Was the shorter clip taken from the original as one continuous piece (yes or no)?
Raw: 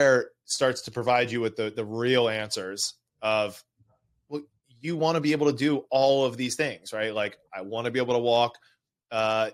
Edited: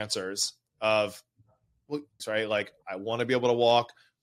no